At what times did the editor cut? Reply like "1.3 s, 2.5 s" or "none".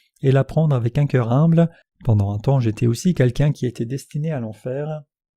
1.8 s